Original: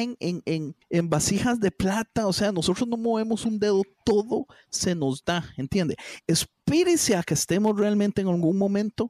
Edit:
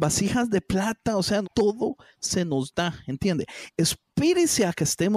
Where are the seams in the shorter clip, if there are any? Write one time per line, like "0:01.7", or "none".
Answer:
0:01.4